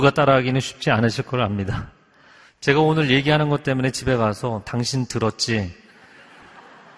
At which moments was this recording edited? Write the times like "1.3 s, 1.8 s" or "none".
none